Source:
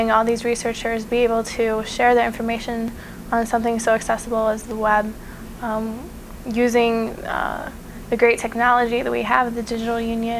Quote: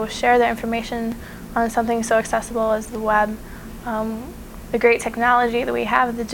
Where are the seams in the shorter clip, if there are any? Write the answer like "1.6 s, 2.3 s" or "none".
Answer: 4.7 s